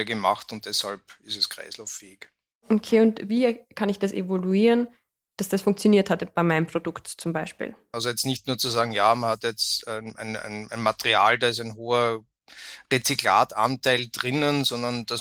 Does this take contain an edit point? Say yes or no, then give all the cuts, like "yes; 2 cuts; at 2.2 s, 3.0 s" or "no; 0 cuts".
yes; 1 cut; at 7.9 s